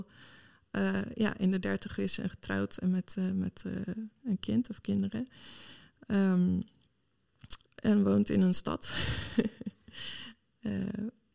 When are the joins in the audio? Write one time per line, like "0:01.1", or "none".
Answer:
0:07.6